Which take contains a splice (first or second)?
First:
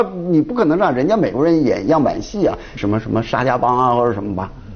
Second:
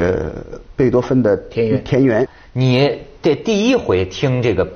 first